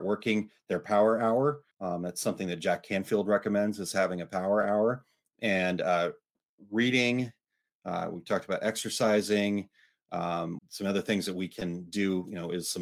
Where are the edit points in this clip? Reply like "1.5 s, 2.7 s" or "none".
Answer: 1.7 s, 10.6 s

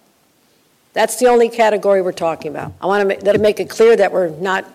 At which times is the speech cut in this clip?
3.3 s

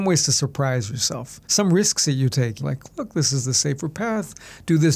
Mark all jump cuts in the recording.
1.4 s, 2.6 s

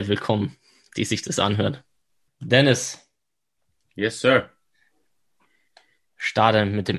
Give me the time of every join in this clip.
2.3 s

